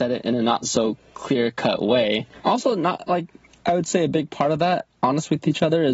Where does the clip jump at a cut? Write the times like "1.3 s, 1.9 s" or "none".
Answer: 2.4 s